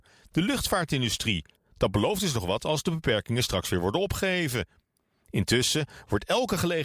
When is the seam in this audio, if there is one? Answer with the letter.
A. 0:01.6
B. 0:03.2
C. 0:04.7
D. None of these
A